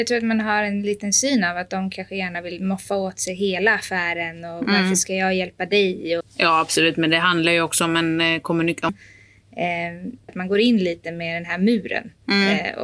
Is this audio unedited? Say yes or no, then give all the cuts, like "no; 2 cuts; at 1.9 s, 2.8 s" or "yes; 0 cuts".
no; 3 cuts; at 6.2 s, 8.9 s, 10.3 s